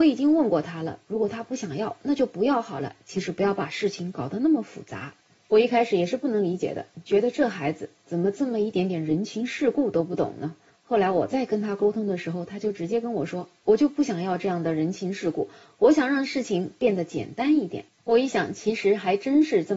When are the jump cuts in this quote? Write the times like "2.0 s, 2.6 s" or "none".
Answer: none